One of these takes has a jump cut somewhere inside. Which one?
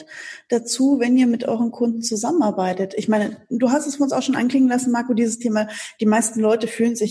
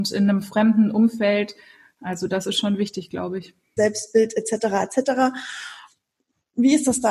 second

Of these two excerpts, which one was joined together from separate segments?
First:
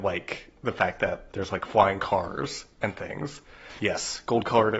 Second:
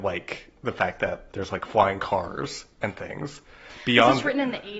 first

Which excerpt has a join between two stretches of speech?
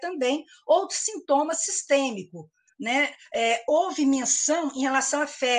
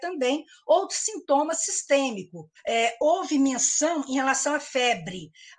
second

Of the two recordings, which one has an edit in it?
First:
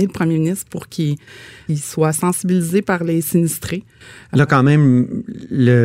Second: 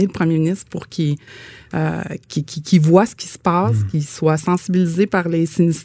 first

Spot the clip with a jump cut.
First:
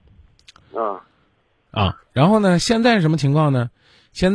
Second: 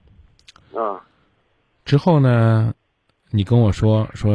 first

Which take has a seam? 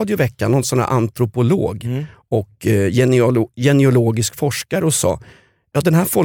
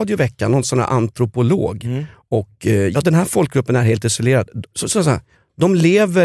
second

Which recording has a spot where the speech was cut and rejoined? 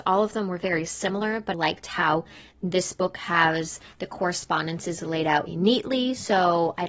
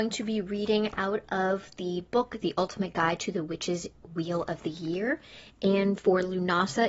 first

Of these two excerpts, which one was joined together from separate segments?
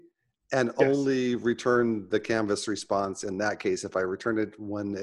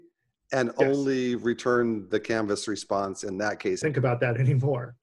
second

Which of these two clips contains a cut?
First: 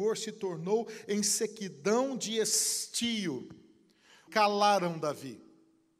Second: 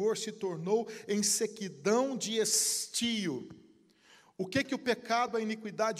first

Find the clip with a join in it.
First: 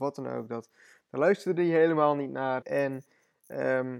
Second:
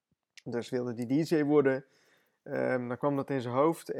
first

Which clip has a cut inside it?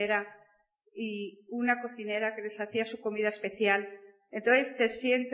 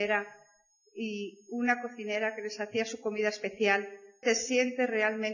second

